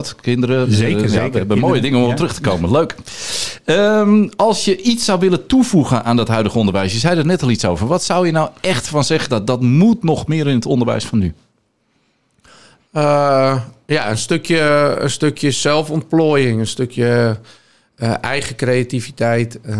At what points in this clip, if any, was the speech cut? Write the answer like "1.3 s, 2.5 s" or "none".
none